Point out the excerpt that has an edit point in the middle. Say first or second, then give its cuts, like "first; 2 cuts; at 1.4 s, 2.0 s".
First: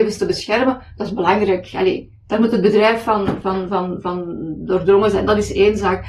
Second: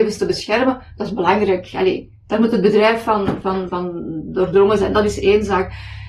second; 1 cut; at 3.7 s